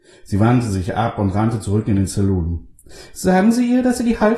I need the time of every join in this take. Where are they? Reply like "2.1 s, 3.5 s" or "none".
none

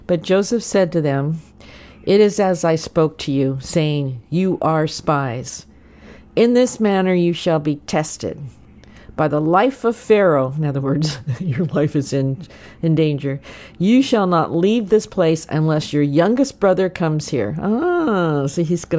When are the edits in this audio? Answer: none

